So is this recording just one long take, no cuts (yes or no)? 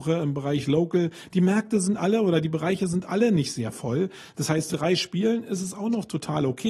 no